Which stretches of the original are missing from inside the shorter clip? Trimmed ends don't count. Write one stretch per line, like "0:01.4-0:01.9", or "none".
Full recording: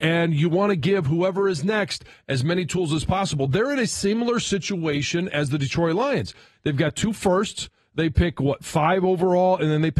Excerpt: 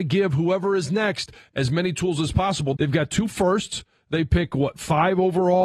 0:03.5-0:06.6